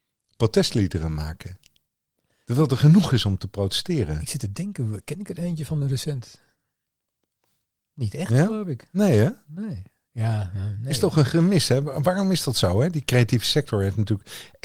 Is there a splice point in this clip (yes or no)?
no